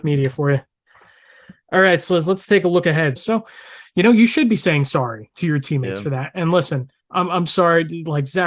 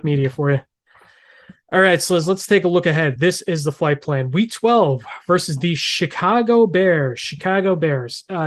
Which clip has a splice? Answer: first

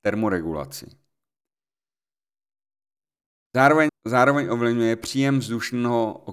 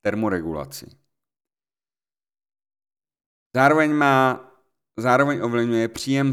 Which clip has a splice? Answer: first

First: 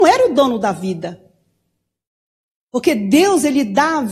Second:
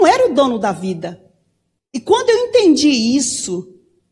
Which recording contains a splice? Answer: second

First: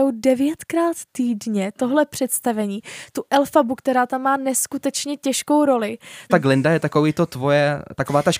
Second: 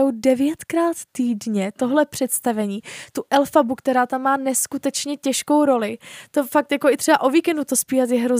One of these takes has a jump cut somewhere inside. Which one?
first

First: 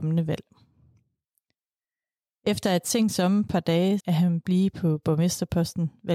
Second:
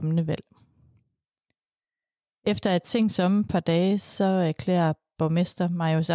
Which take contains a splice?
first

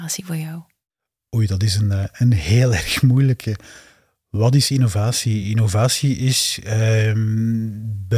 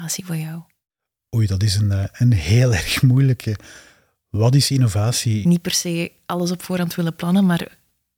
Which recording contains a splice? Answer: second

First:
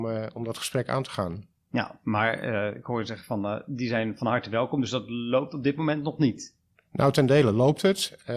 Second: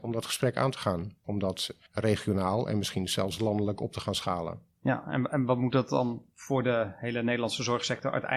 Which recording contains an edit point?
second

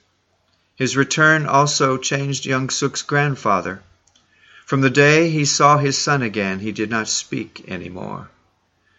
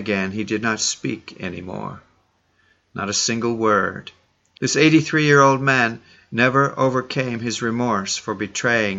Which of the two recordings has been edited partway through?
second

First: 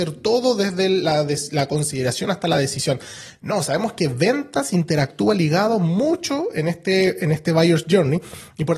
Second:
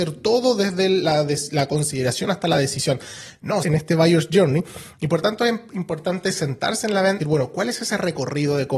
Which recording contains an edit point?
second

